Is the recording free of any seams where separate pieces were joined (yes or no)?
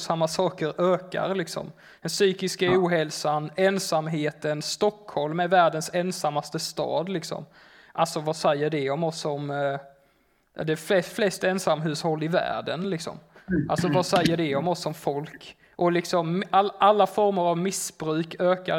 yes